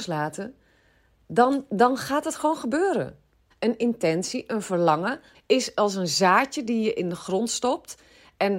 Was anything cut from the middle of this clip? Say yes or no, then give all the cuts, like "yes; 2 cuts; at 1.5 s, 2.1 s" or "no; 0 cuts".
yes; 2 cuts; at 3.5 s, 5.3 s